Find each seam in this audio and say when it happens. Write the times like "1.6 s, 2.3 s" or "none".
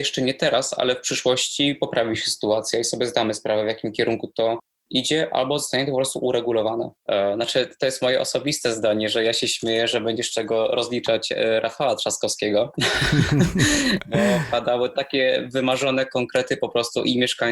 7.0 s